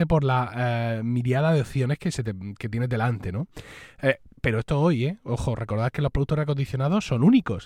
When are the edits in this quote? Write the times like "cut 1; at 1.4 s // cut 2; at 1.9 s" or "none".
none